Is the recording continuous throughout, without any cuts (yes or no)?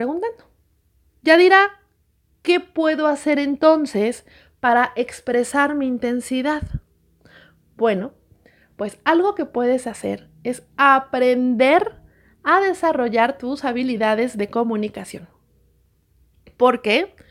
yes